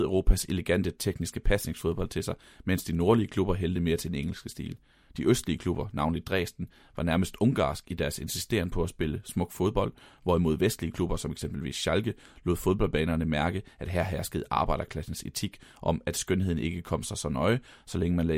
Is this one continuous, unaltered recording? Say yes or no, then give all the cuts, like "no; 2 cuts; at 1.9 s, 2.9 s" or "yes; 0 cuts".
yes; 0 cuts